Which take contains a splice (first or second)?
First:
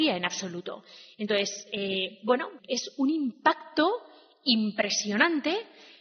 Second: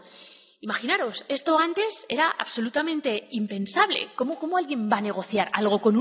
first